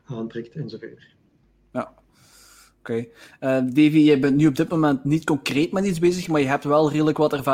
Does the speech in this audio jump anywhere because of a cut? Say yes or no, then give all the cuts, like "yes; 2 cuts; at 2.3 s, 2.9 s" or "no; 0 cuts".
no; 0 cuts